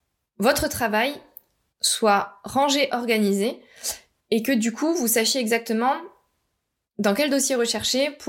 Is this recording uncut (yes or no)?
yes